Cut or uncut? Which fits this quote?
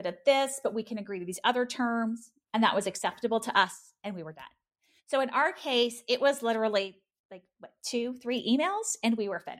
uncut